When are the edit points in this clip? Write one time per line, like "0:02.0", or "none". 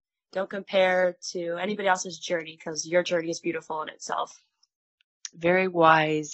0:05.3